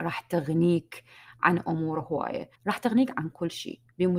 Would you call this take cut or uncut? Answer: cut